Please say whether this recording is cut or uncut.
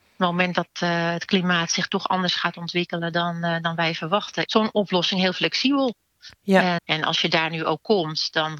cut